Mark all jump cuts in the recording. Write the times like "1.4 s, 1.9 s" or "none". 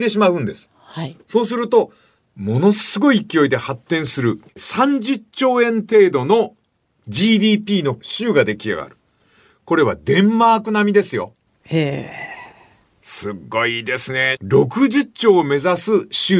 4.5 s

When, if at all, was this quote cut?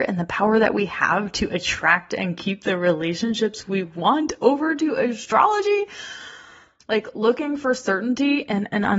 6.8 s

